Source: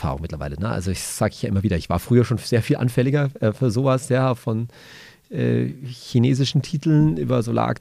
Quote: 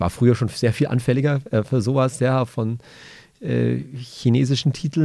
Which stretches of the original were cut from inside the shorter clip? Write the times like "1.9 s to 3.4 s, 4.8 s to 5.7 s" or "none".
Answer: none